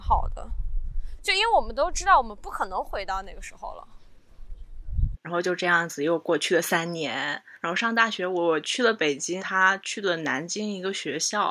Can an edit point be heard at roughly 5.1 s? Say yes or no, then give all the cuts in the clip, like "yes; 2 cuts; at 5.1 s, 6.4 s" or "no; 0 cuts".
yes; 2 cuts; at 5.1 s, 9.4 s